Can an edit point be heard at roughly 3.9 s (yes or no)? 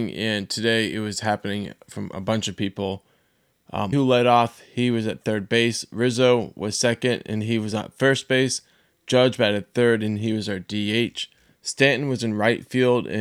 yes